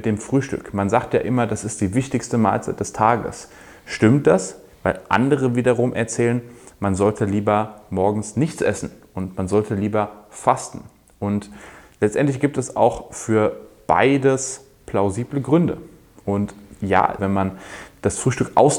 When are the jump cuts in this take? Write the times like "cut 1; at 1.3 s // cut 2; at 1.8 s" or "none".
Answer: cut 1; at 17.2 s